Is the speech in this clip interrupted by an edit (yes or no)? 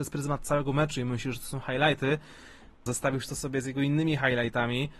yes